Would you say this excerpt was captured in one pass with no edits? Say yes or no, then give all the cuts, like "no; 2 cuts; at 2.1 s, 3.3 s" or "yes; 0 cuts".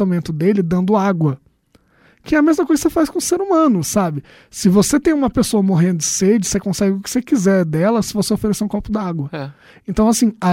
yes; 0 cuts